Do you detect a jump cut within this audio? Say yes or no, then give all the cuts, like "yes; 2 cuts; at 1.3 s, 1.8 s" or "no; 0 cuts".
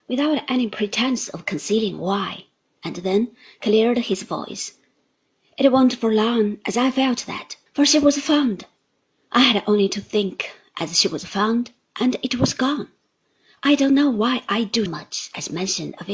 yes; 2 cuts; at 7.7 s, 14.9 s